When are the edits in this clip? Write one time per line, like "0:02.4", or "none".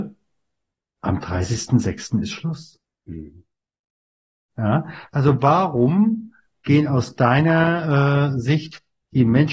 none

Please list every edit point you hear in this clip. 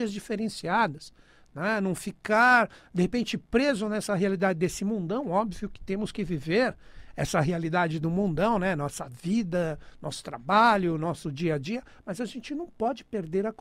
none

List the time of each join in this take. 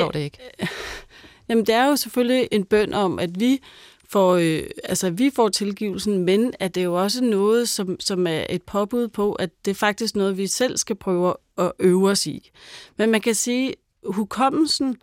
0:02.5

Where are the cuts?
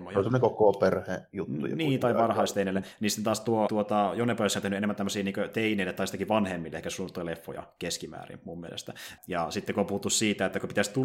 0:03.7
0:09.2

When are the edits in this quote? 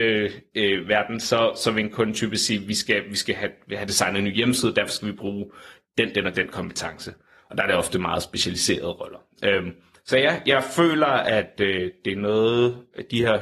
none

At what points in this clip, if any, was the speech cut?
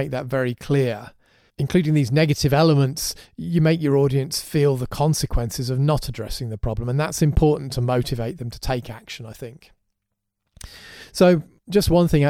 none

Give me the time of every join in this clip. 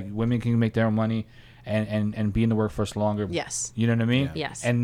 0:03.3

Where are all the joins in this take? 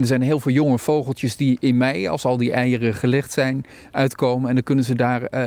none

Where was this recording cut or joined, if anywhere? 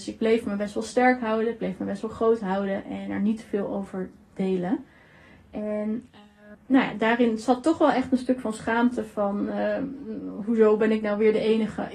0:06.5

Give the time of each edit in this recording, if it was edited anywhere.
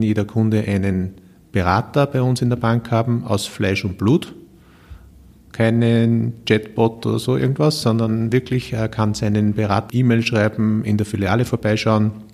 0:09.9

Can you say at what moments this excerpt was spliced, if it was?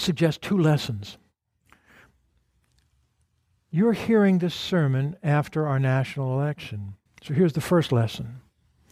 0:07.1

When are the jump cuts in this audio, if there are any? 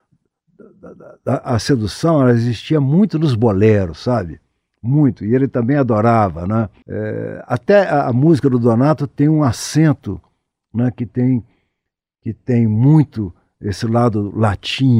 0:06.8

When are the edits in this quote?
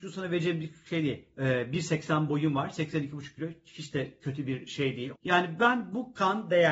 0:01.3
0:05.1

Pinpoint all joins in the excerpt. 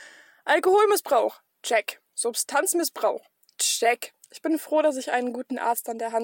0:04.2

